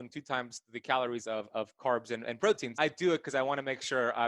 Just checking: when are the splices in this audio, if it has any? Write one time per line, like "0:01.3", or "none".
0:02.7